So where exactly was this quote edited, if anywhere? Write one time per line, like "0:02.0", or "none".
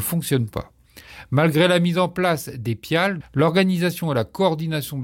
0:03.2